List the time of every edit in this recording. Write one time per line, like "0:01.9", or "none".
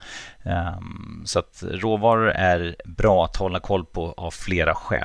none